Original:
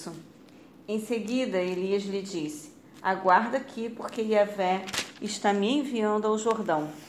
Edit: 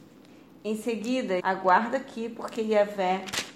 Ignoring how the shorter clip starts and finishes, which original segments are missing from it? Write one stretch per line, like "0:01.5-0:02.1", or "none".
0:01.6-0:03.0